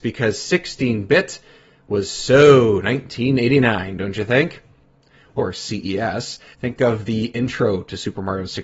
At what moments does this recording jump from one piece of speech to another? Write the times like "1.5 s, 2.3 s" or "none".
5.4 s, 6.5 s

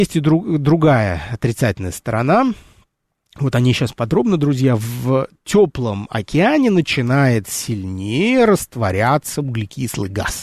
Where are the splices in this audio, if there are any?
none

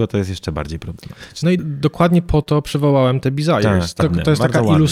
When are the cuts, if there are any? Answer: 1.6 s, 4.0 s

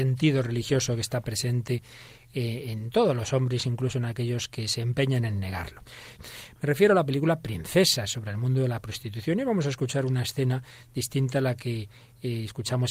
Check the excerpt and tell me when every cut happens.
6.2 s

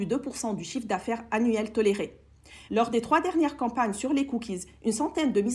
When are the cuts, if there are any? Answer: 2.7 s

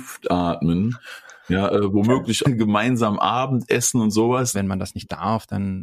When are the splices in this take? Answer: 2.4 s, 4.5 s

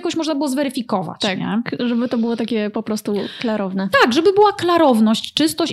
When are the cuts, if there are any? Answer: none

